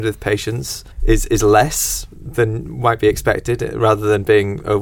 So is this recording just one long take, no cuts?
no; 1 cut; at 0.9 s

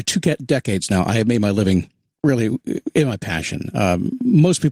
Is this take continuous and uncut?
yes; 0 cuts

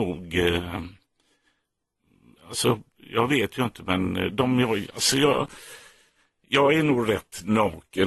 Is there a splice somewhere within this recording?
no; 0 cuts

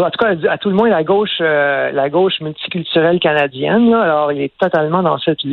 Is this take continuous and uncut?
yes; 0 cuts

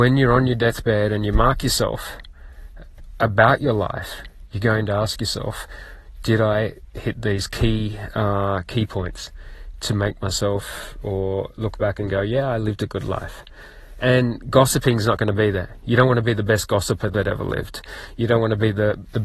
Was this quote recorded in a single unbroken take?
yes; 0 cuts

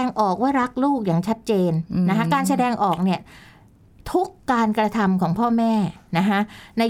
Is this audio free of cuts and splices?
yes; 0 cuts

